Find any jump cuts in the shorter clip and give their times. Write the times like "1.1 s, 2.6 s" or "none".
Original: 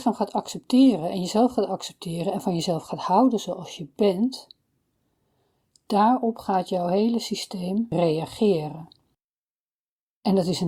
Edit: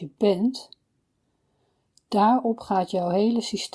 none